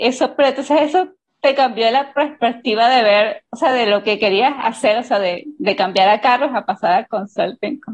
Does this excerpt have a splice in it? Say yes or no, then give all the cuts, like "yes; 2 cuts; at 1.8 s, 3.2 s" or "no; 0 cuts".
no; 0 cuts